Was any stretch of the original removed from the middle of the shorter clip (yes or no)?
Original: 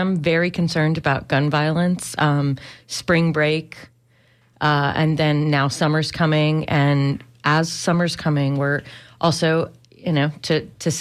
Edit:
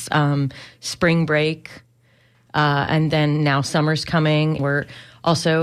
yes